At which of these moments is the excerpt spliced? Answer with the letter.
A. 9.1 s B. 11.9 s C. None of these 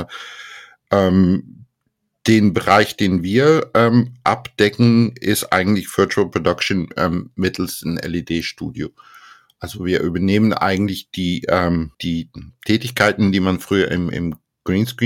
B